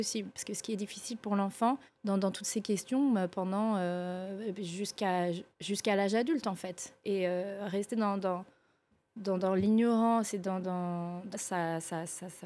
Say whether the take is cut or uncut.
cut